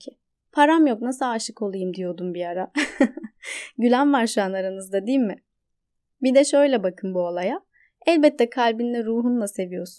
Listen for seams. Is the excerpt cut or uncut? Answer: uncut